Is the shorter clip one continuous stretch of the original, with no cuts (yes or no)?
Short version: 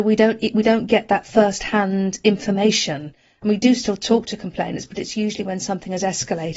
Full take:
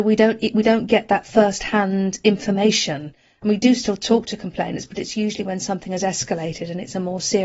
yes